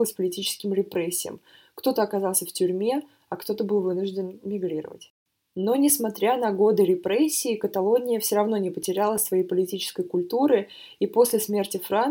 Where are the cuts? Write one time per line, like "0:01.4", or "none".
none